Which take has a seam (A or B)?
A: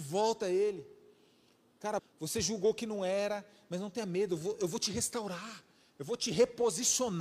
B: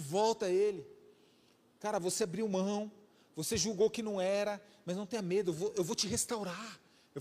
A